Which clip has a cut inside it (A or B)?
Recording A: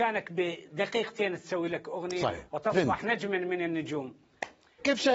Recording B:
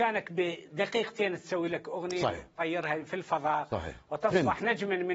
A